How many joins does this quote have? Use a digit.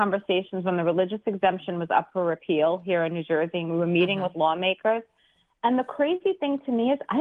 0